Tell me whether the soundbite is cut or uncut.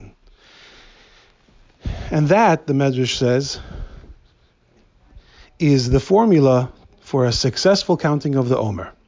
uncut